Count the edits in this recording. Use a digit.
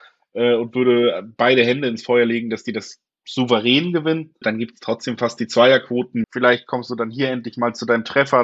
2